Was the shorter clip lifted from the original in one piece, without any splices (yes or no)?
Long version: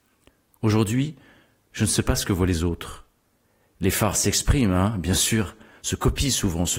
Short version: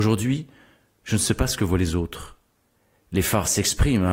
yes